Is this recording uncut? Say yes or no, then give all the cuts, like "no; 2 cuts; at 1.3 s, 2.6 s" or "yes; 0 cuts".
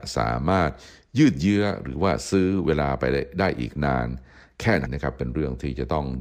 no; 1 cut; at 4.9 s